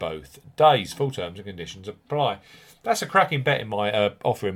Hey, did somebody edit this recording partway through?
no; 0 cuts

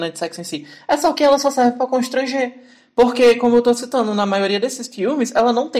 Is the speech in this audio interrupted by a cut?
no; 0 cuts

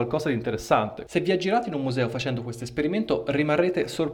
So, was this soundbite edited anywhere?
yes; 1 cut; at 1.1 s

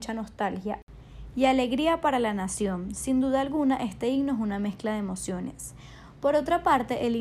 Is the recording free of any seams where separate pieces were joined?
yes; 0 cuts

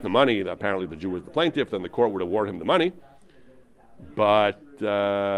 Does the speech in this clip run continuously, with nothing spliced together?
yes; 0 cuts

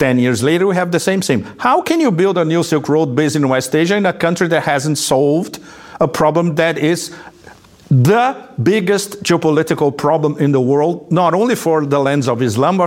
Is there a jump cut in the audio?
no; 0 cuts

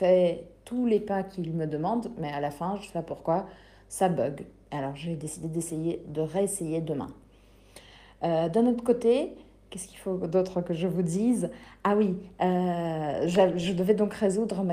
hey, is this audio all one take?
yes; 0 cuts

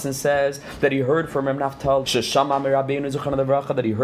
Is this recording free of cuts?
no; 1 cut; at 2.0 s

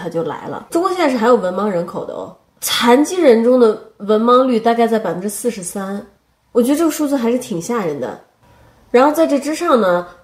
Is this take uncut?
yes; 0 cuts

